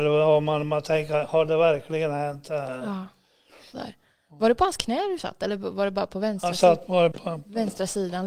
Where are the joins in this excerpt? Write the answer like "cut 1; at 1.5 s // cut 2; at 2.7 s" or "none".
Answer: cut 1; at 3.7 s // cut 2; at 7.1 s